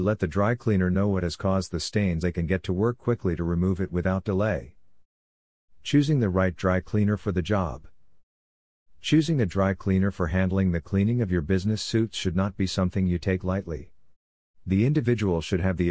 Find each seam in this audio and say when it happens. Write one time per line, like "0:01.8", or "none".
0:02.2

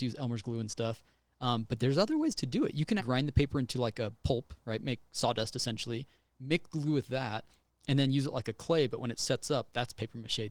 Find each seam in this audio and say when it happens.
0:03.0

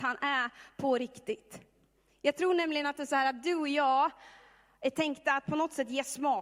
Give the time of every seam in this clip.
none

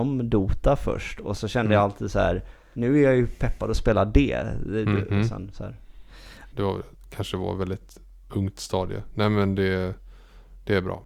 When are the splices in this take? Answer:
0:02.7
0:05.1
0:06.5

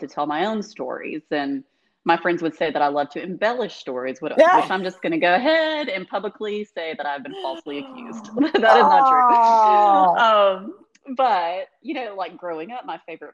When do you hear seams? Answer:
none

